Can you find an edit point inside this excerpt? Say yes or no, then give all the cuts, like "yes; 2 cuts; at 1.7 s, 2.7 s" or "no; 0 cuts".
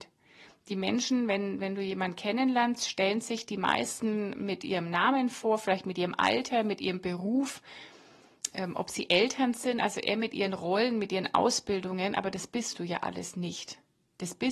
no; 0 cuts